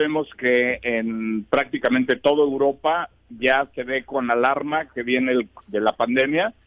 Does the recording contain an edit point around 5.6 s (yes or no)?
yes